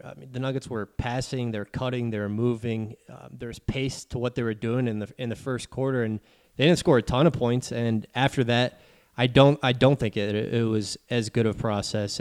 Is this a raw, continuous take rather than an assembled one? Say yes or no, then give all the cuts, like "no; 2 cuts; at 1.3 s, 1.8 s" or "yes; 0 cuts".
no; 1 cut; at 7.7 s